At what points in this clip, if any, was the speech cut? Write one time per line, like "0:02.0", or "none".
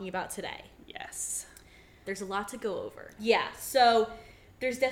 0:02.0
0:03.2